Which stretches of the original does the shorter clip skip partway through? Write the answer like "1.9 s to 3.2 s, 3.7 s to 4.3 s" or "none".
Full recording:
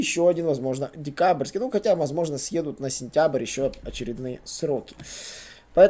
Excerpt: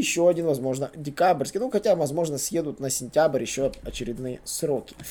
none